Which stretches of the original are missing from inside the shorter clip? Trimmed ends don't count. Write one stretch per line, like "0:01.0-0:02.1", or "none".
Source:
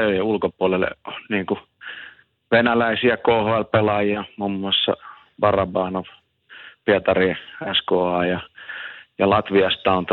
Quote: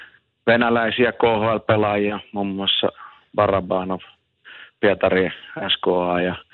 none